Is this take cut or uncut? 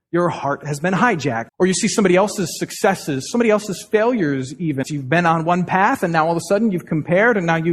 cut